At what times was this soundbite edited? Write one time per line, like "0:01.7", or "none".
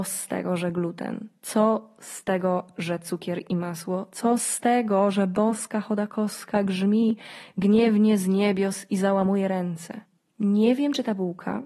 none